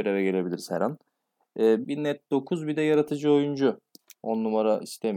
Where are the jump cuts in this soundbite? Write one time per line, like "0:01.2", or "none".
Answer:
0:01.8
0:04.2